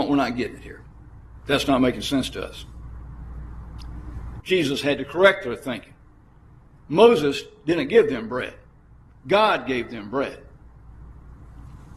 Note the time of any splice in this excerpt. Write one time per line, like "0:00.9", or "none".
0:04.4